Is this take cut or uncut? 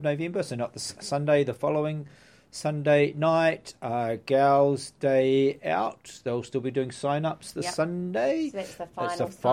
uncut